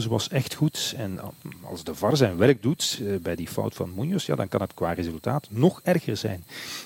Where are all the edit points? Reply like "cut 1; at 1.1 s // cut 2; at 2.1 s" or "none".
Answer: none